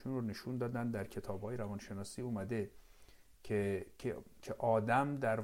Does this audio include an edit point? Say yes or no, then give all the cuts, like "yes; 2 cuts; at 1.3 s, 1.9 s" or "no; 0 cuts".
no; 0 cuts